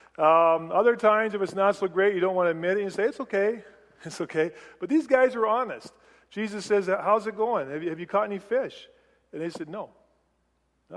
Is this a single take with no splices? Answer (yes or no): yes